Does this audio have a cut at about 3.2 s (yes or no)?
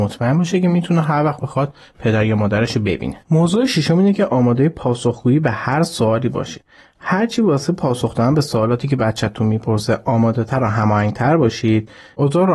yes